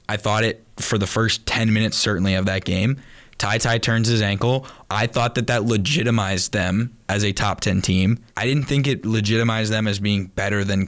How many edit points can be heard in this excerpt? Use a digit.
2